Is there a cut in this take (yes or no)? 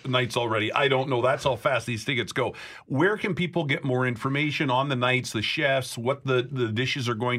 no